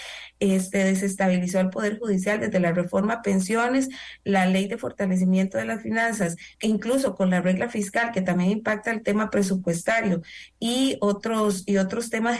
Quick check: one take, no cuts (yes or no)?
no